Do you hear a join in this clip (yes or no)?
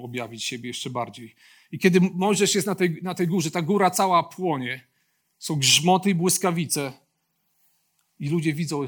no